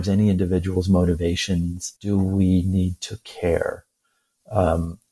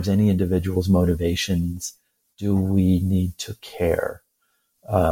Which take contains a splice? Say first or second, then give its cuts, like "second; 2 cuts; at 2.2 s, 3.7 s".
first; 1 cut; at 2.0 s